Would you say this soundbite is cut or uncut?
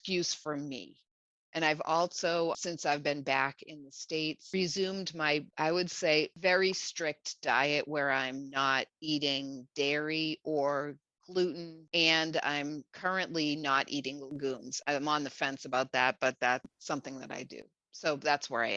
uncut